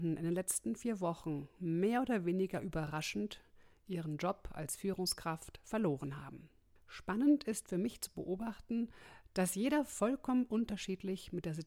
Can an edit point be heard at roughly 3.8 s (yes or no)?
no